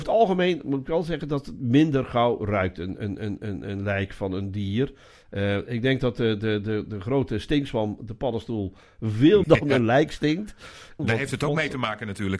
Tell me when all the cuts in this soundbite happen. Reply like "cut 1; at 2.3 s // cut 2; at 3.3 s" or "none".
cut 1; at 9.4 s // cut 2; at 11.0 s